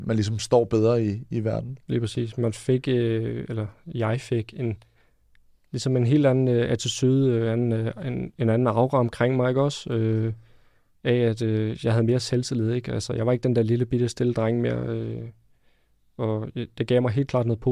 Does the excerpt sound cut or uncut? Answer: uncut